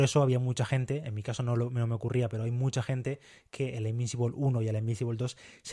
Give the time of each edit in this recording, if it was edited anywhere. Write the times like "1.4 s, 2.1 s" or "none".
none